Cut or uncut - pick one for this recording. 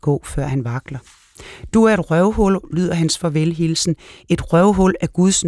uncut